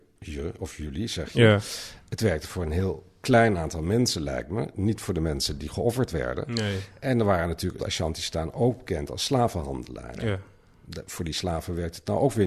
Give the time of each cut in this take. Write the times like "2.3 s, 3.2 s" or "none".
7.8 s